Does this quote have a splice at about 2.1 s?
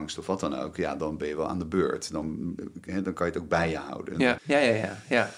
no; 1 cut; at 4.4 s

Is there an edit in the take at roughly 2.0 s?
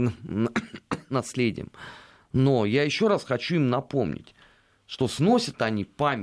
no; 0 cuts

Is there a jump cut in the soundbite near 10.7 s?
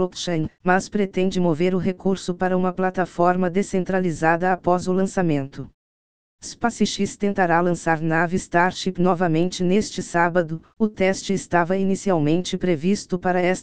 no; 1 cut; at 6.3 s

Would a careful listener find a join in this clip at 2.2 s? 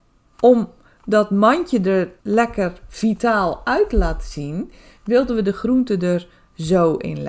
yes; 1 cut; at 2.2 s

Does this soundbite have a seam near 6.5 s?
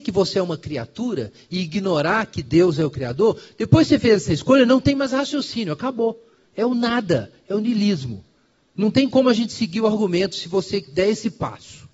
no; 0 cuts

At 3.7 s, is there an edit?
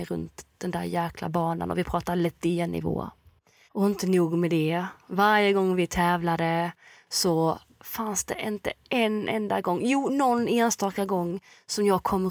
yes; 1 cut; at 3.7 s

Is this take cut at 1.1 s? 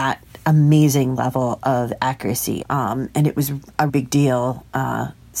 no; 2 cuts; at 2.6 s, 3.9 s

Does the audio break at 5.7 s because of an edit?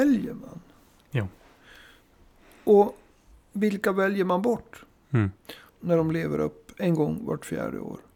yes; 1 cut; at 5.7 s

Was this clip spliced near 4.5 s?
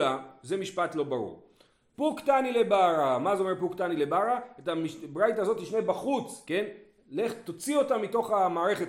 no; 2 cuts; at 1.9 s, 6.4 s

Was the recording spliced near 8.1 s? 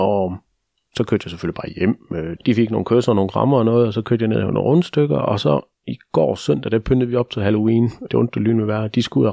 yes; 2 cuts; at 2.4 s, 8.1 s

